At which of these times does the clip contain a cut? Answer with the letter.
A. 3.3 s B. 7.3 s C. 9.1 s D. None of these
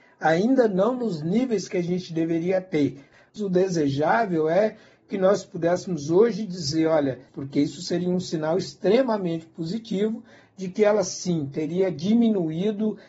B